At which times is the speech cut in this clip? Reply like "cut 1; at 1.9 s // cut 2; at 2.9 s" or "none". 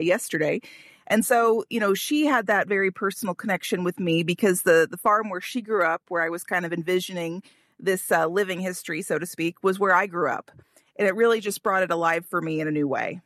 cut 1; at 10.9 s